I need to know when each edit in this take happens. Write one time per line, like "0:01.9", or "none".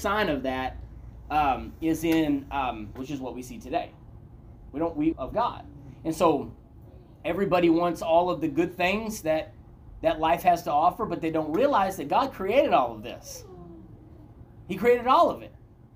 0:03.0
0:05.1

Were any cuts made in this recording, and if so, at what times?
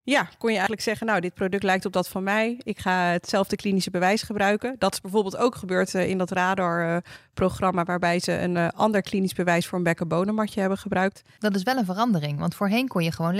0:11.4

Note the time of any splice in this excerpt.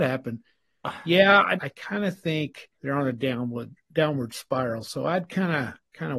0:01.6
0:02.7

